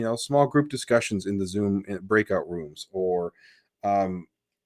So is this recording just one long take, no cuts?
yes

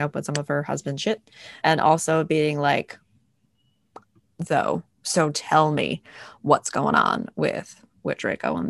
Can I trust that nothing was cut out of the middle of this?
no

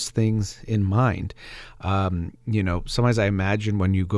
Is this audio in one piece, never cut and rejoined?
yes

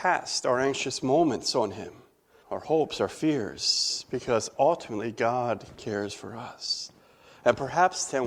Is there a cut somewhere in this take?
yes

